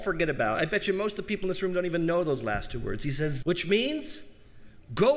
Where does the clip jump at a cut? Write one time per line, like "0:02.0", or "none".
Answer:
0:03.4